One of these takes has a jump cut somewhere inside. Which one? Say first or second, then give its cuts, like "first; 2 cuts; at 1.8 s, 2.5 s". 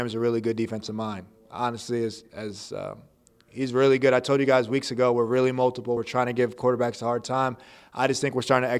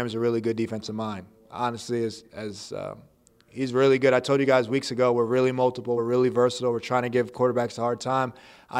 first; 1 cut; at 6.0 s